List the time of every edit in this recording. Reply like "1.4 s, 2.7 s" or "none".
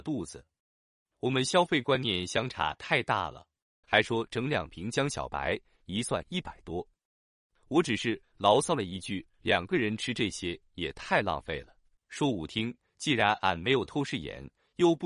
3.8 s, 12.0 s